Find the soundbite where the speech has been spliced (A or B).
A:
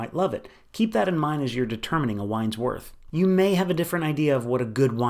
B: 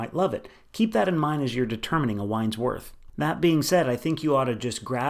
A